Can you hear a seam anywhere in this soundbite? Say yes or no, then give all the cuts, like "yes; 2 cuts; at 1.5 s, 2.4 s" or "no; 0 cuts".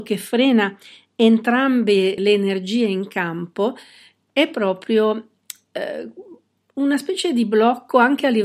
yes; 1 cut; at 2.2 s